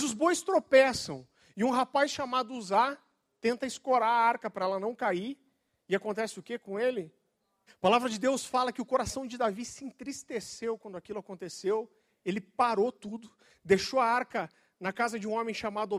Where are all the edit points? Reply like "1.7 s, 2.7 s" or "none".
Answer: 7.7 s